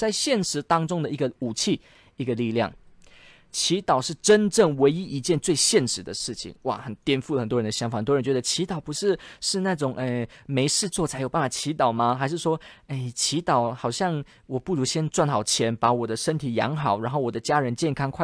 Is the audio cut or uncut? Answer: uncut